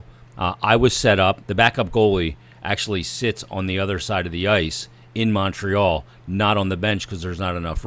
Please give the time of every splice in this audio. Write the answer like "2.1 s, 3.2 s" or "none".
1.4 s